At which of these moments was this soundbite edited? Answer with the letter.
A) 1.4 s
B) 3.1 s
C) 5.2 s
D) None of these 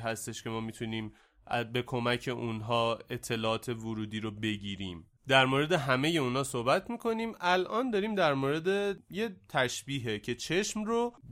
C